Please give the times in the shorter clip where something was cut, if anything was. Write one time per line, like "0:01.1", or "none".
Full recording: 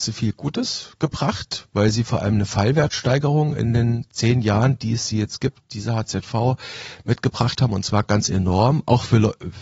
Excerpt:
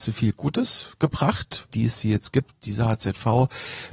0:01.7